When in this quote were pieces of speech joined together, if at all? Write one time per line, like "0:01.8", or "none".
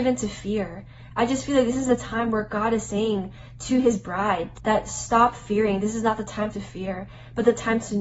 0:04.6